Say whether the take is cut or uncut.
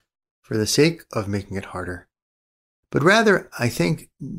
uncut